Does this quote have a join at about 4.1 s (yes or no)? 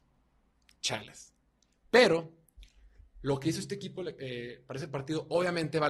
no